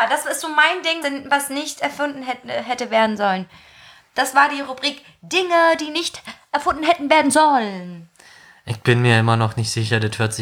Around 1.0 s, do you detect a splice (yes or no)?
yes